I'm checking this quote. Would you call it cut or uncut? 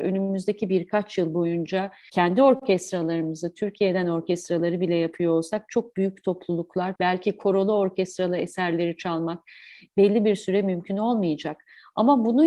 cut